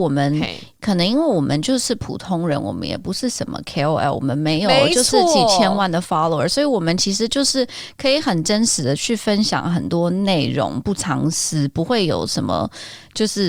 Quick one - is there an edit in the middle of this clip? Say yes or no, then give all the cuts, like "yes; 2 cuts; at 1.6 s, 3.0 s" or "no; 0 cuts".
no; 0 cuts